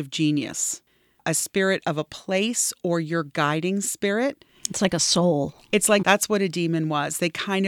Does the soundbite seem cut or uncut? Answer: cut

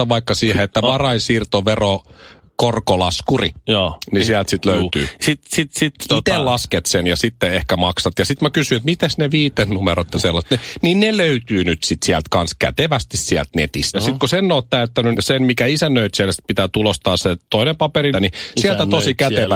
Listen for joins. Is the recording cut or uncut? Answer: cut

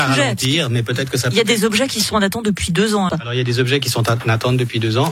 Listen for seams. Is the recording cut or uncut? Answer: cut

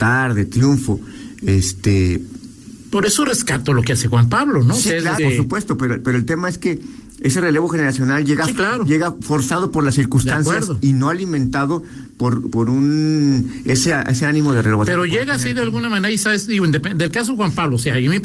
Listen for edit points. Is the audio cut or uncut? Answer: cut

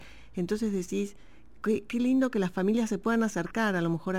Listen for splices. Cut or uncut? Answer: uncut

